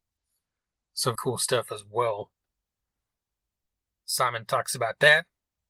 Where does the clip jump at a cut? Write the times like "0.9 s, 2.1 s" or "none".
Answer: 1.2 s